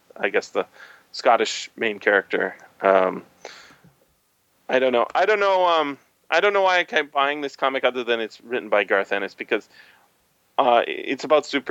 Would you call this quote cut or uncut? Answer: uncut